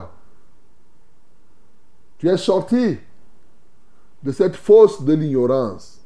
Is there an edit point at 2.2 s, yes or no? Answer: yes